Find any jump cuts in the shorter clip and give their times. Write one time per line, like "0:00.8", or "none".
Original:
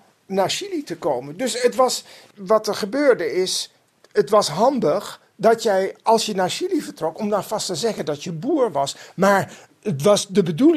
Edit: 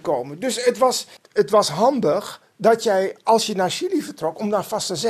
0:01.2